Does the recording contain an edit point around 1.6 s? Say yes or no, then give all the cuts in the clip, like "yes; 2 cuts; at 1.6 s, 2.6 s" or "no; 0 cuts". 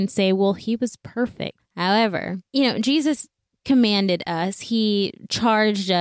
yes; 1 cut; at 1.6 s